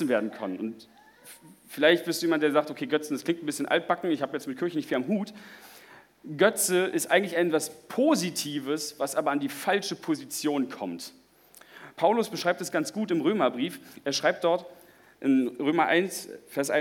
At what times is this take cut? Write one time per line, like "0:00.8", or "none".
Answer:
none